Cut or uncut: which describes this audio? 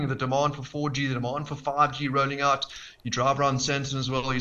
uncut